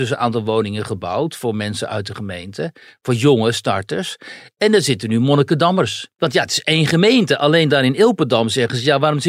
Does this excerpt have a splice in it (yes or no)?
yes